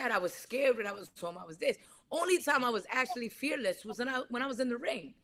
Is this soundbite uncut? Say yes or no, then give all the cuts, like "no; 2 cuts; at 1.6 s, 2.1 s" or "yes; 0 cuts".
yes; 0 cuts